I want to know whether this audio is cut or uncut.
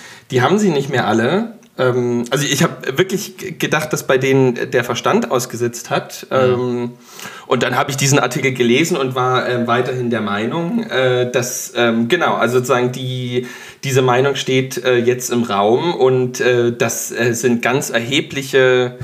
uncut